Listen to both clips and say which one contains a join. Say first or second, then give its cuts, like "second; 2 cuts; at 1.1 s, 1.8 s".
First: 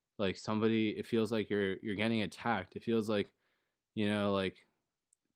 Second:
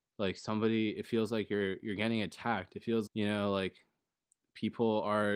second; 1 cut; at 3.1 s